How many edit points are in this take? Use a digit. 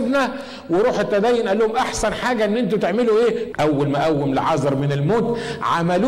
1